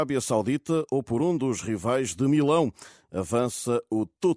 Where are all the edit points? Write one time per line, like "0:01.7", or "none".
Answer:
none